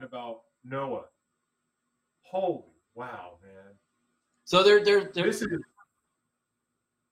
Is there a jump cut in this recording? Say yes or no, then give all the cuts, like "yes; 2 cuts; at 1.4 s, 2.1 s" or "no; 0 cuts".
no; 0 cuts